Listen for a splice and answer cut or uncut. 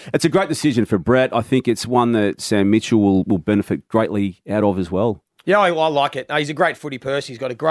uncut